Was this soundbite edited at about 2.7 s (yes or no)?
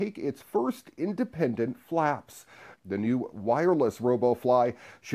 yes